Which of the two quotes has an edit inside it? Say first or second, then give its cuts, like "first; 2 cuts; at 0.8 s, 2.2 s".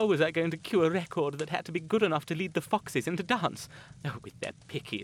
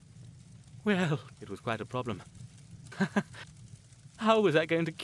second; 2 cuts; at 1.3 s, 2.9 s